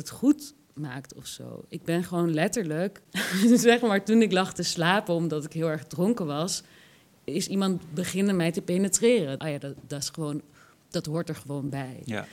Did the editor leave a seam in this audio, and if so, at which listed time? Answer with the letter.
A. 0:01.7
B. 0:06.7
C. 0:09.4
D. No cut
C